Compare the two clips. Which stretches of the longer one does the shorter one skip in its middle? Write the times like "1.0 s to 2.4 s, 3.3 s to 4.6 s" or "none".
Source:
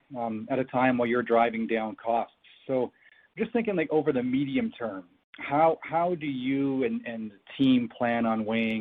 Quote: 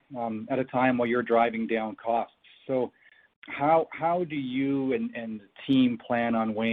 3.3 s to 5.2 s